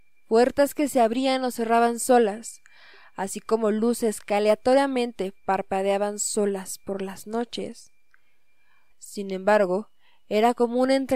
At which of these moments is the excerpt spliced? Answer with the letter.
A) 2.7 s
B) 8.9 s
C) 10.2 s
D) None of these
B